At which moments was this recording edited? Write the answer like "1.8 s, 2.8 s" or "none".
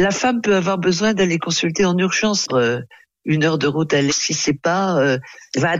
2.5 s, 4.1 s